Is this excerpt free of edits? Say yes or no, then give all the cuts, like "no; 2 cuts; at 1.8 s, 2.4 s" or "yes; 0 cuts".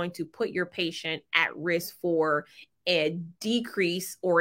yes; 0 cuts